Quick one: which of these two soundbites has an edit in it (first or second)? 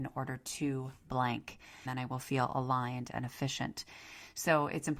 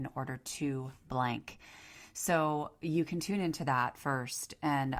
first